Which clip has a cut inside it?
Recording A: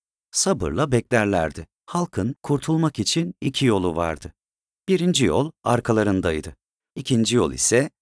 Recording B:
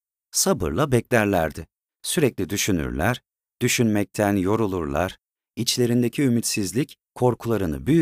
A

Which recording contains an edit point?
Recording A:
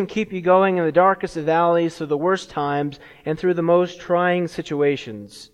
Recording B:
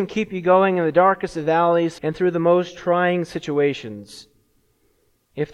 B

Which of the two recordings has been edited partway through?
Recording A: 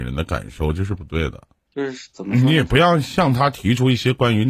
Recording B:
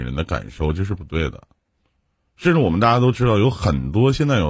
A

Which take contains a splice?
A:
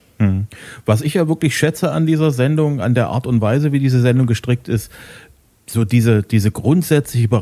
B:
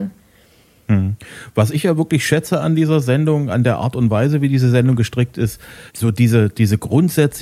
B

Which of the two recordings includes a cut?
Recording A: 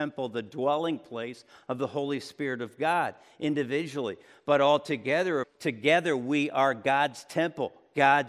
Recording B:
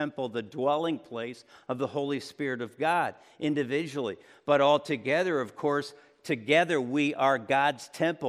A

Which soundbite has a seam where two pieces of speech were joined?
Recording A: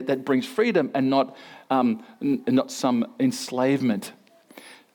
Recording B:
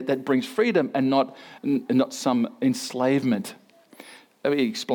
B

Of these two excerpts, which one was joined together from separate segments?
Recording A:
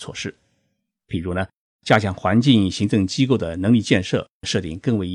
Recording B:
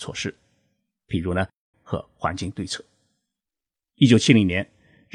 B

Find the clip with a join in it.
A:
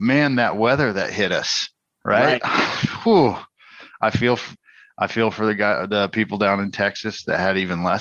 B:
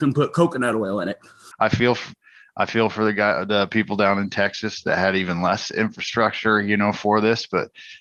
B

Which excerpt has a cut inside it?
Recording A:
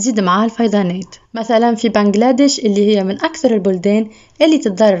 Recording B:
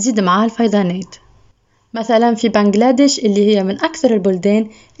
A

